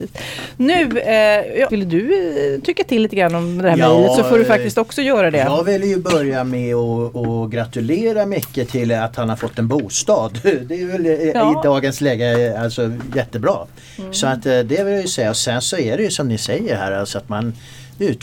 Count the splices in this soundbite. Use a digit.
1